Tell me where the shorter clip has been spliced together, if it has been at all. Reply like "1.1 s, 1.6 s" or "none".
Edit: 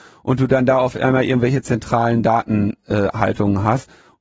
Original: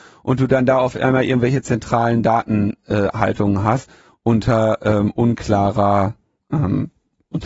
none